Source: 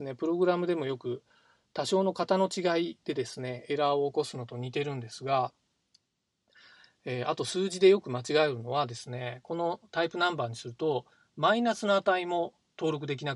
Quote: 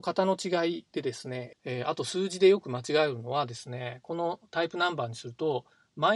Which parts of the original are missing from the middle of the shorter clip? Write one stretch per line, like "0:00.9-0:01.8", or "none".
0:03.6-0:06.9